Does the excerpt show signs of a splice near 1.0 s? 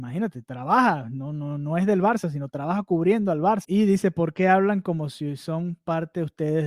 no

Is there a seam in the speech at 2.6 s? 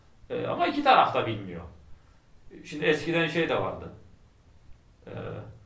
no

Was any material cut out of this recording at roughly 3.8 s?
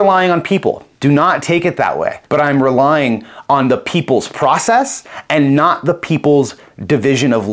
no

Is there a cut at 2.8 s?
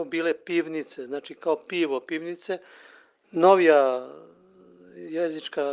no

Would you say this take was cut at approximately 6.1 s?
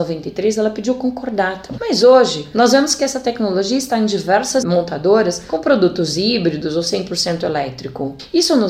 no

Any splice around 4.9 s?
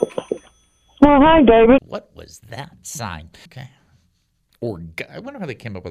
no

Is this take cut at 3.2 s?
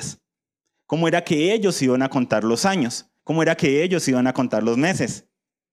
yes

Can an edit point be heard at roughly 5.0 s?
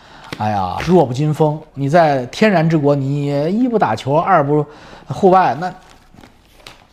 no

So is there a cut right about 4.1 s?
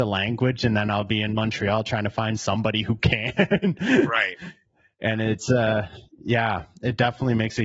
no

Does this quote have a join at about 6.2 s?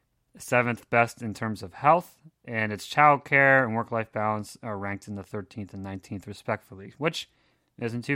no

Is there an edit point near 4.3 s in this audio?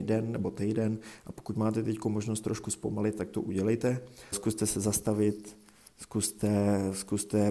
yes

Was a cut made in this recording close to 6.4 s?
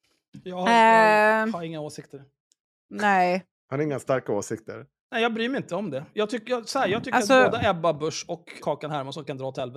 yes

